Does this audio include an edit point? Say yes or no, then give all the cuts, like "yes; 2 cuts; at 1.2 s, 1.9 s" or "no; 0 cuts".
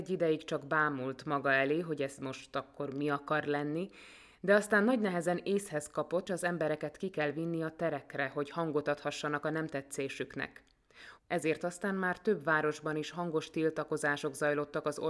yes; 2 cuts; at 6.3 s, 11.2 s